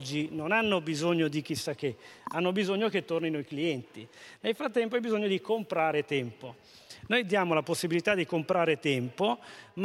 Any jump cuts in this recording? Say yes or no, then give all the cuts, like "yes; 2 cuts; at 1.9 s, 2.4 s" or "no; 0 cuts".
yes; 1 cut; at 4.4 s